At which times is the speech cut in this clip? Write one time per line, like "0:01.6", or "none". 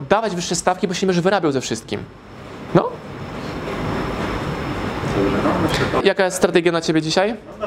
0:06.0